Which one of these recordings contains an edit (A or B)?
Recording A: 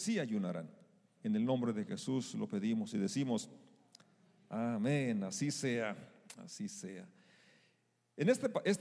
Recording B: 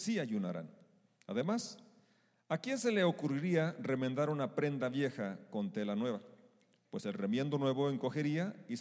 A